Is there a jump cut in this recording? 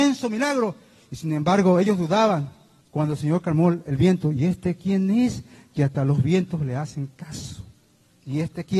yes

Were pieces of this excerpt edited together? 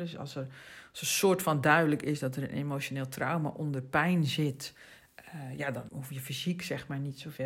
yes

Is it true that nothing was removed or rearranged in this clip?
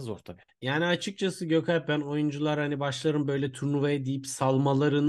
yes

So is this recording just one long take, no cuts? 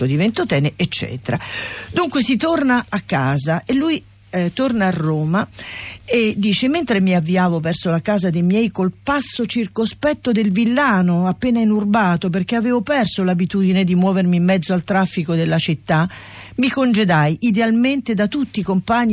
yes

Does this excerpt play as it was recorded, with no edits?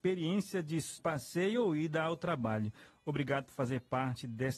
no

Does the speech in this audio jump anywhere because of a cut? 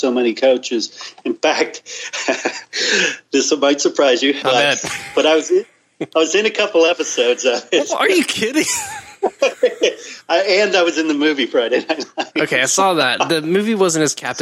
yes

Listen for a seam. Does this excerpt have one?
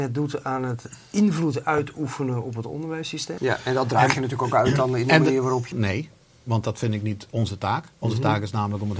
yes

